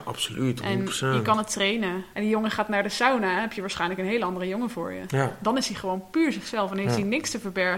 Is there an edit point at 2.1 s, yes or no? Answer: yes